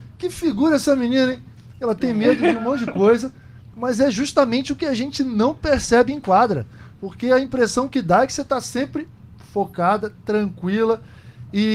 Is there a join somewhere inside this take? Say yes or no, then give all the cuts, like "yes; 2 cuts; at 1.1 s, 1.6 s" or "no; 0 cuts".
yes; 1 cut; at 3.7 s